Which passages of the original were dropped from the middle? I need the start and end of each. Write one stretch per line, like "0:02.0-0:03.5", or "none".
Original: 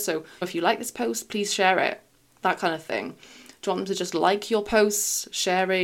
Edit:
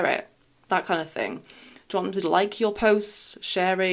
0:03.9-0:04.1